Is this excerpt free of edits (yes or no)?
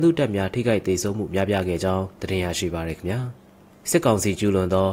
yes